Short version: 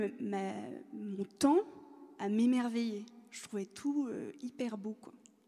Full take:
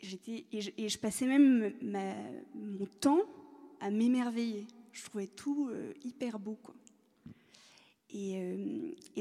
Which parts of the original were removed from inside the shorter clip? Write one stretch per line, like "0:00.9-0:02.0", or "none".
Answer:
none